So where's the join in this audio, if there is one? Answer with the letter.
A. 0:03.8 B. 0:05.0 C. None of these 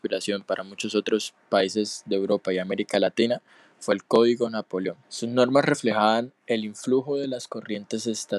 B